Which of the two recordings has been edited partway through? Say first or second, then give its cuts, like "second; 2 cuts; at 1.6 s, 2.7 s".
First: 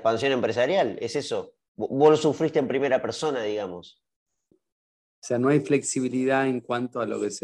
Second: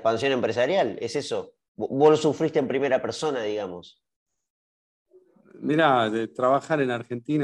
first; 1 cut; at 4.5 s